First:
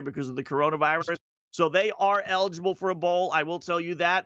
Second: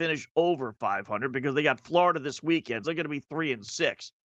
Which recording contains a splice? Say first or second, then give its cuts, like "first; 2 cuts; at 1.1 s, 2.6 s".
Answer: second; 1 cut; at 2.8 s